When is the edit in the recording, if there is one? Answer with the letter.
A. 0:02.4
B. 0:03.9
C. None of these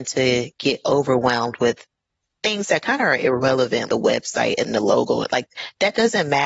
B